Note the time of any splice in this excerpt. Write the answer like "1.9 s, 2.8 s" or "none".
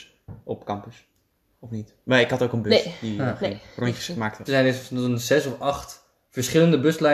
4.5 s